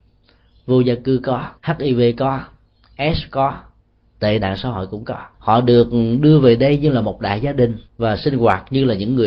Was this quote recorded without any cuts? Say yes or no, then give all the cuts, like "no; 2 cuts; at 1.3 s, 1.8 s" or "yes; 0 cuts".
no; 3 cuts; at 1.6 s, 5.3 s, 7.9 s